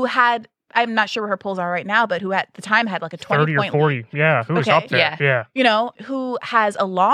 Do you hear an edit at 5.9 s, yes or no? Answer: yes